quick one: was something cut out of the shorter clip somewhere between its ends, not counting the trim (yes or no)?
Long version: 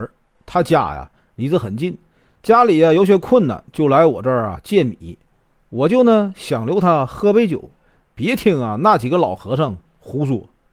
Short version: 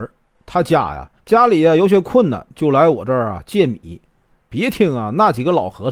yes